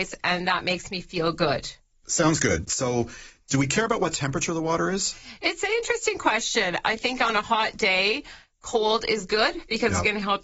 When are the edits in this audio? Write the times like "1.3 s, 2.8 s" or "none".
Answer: 6.8 s

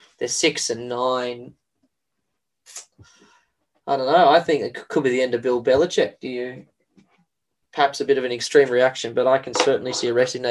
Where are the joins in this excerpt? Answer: none

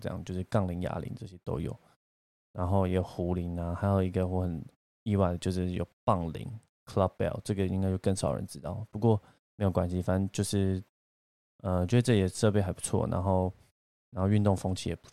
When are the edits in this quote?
none

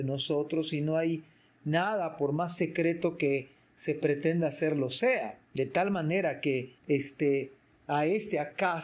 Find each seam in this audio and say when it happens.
5.4 s, 6.8 s

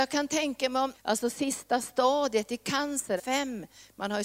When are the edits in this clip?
0.9 s, 3.2 s

